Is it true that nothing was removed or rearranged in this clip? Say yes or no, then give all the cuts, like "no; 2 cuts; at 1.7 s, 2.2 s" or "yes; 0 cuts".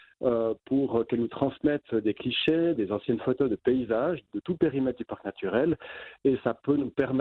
no; 2 cuts; at 2.8 s, 4.3 s